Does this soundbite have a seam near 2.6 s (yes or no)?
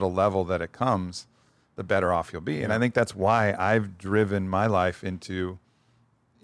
no